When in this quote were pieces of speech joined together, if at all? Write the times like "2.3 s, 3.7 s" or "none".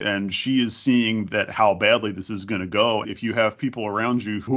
3.0 s